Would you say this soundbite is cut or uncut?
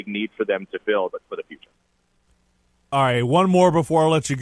cut